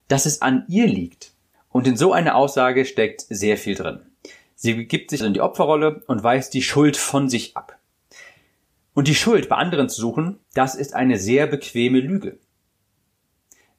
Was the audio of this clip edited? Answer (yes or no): yes